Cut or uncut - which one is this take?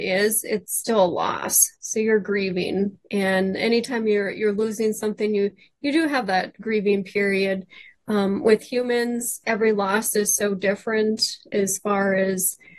uncut